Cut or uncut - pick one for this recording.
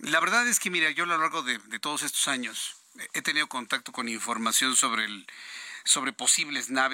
uncut